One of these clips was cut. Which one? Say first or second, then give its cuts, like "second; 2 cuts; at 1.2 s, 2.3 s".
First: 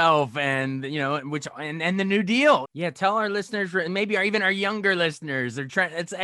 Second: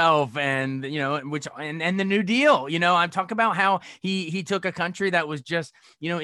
first; 1 cut; at 2.6 s